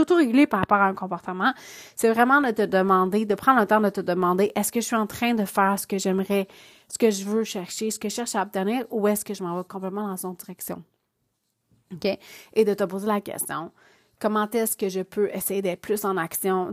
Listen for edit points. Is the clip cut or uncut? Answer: uncut